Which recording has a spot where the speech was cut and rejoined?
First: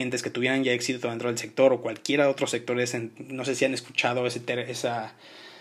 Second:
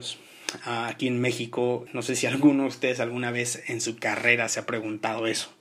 second; 1 cut; at 1.9 s

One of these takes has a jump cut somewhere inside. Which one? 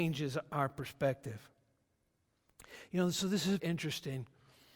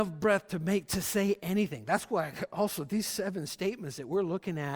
first; 1 cut; at 3.6 s

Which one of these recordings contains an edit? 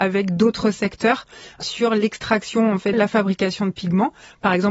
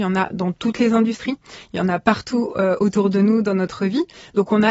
first; 1 cut; at 2.9 s

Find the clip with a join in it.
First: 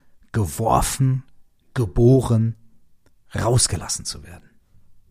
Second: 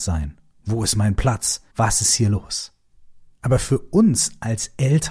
second; 1 cut; at 1.7 s

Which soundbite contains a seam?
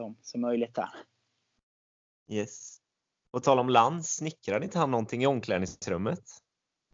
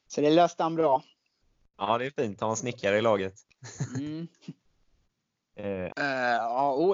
second; 1 cut; at 5.9 s

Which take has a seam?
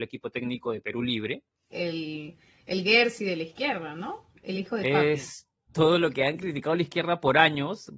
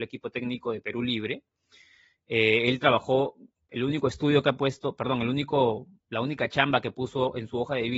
first; 1 cut; at 1.7 s

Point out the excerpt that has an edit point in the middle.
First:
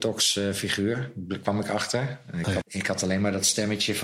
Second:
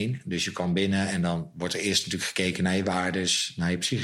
first; 1 cut; at 2.6 s

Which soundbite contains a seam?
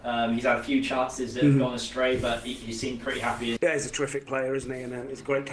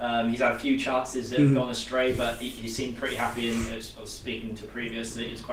first; 1 cut; at 3.6 s

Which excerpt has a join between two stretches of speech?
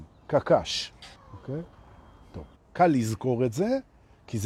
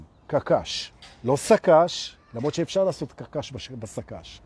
first; 2 cuts; at 1.2 s, 2.6 s

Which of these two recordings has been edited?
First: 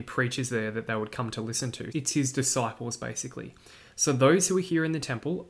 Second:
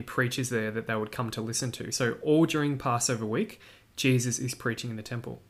first; 1 cut; at 1.9 s

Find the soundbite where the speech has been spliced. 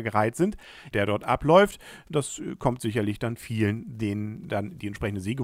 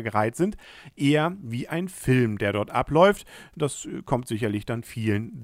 first; 1 cut; at 0.9 s

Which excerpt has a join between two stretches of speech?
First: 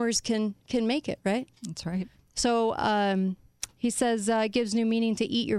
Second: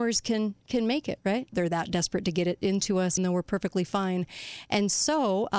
second; 2 cuts; at 1.5 s, 3.2 s

